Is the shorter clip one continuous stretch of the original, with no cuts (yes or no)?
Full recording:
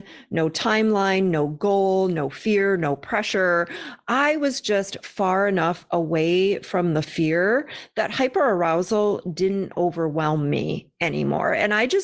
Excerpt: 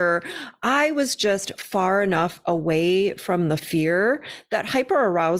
yes